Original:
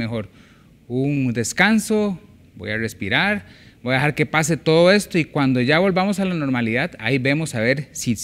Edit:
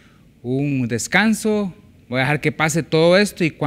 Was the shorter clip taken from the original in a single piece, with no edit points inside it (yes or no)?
no